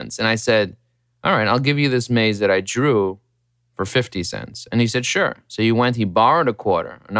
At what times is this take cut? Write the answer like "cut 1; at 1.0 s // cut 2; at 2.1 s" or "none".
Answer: none